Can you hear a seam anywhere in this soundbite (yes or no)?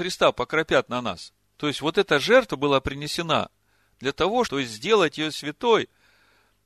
yes